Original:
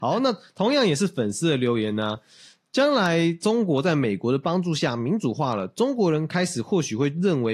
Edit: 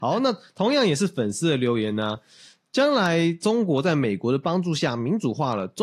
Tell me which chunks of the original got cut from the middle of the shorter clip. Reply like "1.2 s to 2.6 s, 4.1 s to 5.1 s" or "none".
none